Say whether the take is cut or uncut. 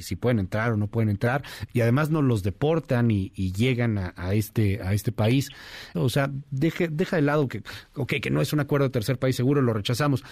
cut